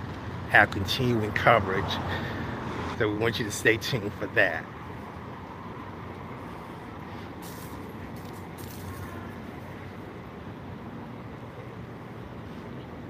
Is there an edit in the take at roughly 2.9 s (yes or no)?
yes